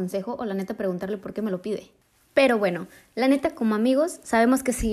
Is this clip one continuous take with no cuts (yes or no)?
yes